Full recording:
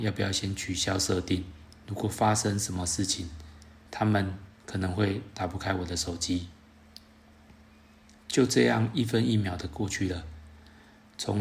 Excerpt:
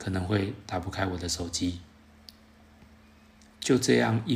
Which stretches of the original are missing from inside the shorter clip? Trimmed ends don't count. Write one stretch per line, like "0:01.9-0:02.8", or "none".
none